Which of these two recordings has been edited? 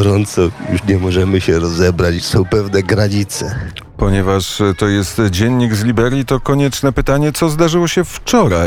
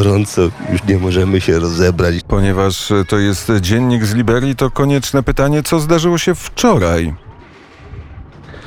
second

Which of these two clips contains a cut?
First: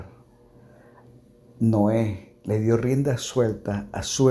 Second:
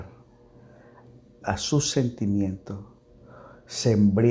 second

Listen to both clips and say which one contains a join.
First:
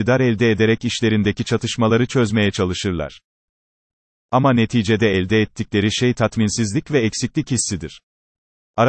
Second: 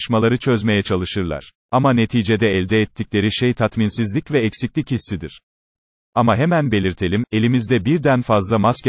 second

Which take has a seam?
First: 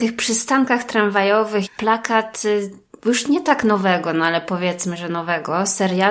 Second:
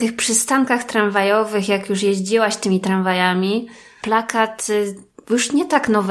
first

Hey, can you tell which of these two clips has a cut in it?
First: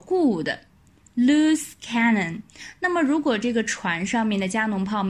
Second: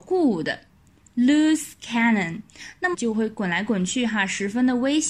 second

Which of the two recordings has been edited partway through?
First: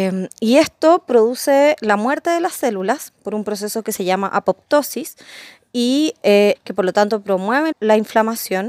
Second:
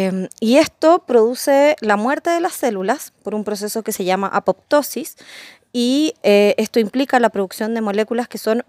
first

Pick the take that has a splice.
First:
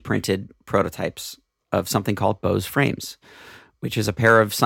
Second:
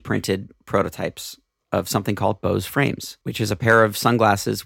second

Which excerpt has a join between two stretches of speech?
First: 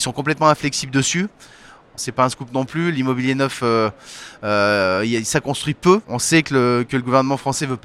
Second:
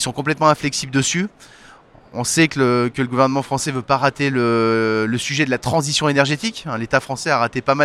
first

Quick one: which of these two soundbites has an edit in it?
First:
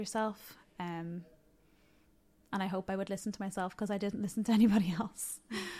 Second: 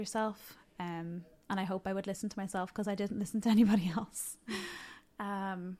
second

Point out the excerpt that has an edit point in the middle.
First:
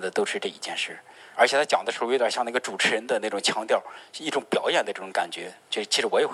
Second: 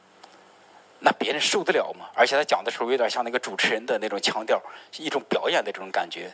first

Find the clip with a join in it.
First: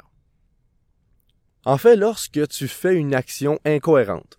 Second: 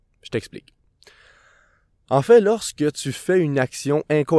first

